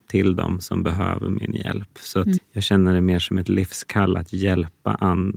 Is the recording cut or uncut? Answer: cut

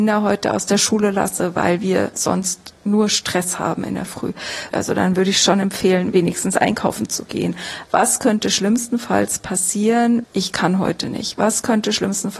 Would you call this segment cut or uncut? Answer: cut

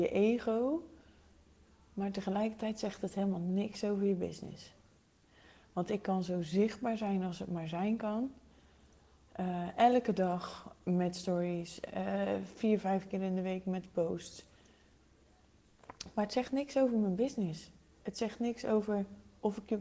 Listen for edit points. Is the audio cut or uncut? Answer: uncut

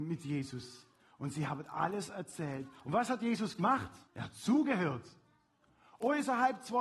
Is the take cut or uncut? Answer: cut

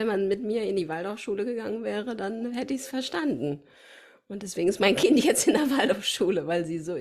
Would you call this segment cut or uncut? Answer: uncut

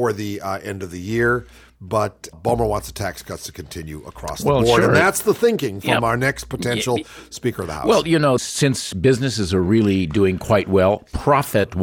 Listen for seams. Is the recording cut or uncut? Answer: cut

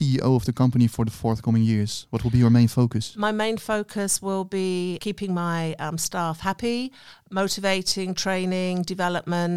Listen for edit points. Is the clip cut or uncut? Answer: uncut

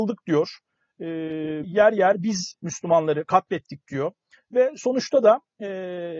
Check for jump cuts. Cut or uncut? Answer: cut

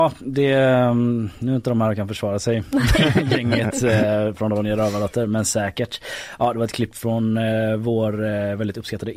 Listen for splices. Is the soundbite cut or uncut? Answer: uncut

